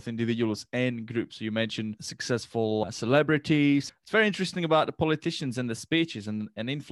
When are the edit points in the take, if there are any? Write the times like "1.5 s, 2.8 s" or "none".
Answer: 3.9 s